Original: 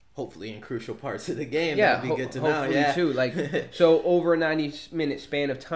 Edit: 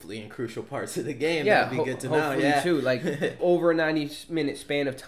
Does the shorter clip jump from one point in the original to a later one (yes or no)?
yes